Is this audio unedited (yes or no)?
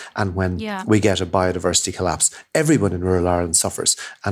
yes